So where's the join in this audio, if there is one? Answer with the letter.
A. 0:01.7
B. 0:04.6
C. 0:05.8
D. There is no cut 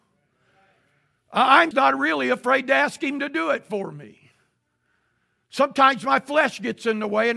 A